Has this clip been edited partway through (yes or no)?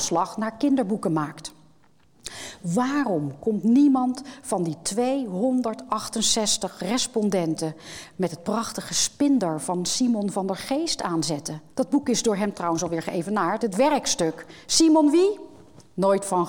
yes